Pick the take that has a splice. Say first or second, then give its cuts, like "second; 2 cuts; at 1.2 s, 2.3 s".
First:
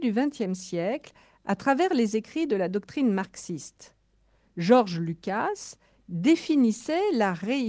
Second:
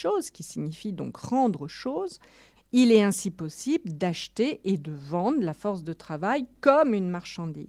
second; 1 cut; at 2.6 s